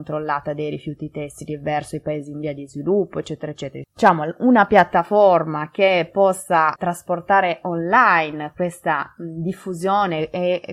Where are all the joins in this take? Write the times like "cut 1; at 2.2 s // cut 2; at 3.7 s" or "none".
cut 1; at 3.8 s // cut 2; at 6.8 s